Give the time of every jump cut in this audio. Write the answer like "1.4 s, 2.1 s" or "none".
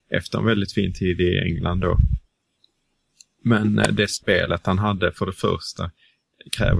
none

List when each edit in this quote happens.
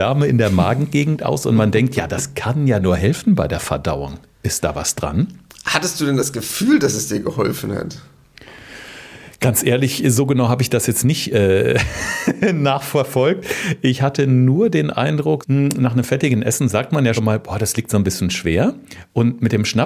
15.4 s, 17.2 s

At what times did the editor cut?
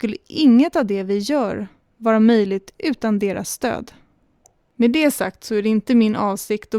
none

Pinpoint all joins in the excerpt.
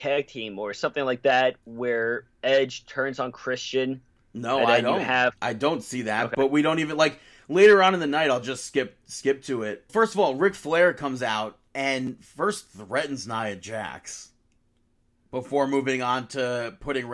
9.9 s

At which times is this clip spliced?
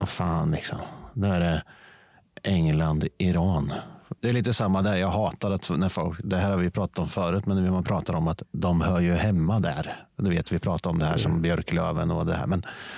4.2 s

